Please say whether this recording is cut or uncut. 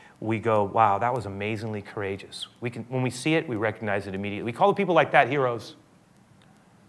uncut